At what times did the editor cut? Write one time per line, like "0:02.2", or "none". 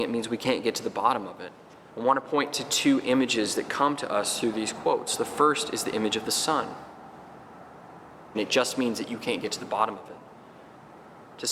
0:01.9
0:08.3